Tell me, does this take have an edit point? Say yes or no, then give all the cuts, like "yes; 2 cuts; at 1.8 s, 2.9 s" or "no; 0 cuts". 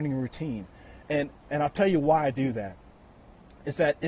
no; 0 cuts